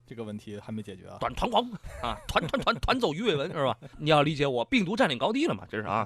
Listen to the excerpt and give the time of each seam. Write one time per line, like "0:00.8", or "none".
0:03.9